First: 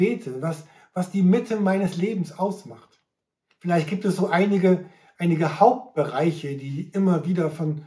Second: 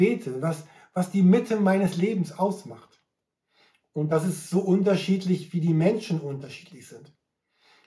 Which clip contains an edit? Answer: first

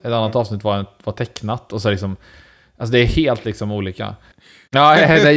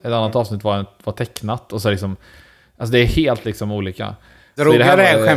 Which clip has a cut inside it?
first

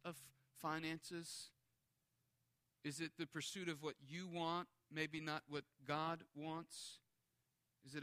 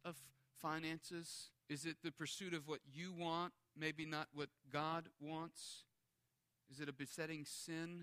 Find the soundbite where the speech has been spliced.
second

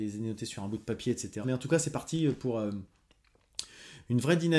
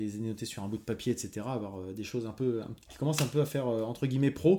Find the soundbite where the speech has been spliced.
first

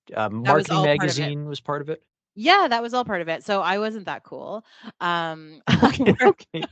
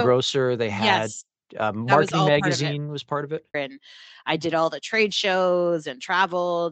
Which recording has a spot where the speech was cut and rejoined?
second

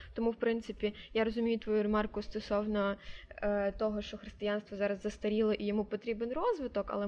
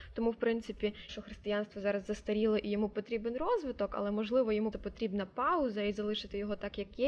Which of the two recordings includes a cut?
second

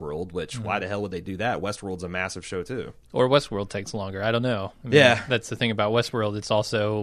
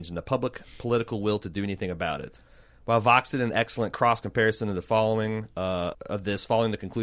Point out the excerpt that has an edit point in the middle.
second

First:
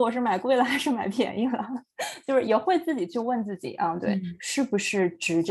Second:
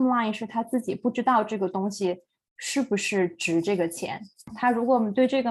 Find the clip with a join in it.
first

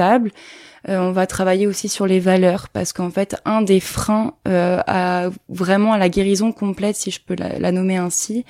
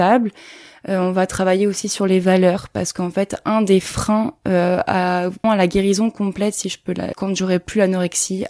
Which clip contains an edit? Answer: second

